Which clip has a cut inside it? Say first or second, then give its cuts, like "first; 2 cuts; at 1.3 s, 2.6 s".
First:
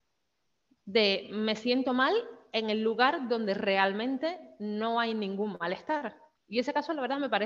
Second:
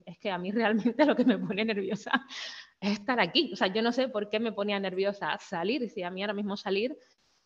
first; 1 cut; at 6.4 s